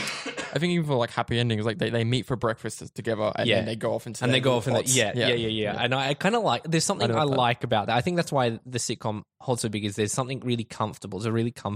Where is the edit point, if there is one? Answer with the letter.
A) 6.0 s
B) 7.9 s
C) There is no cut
C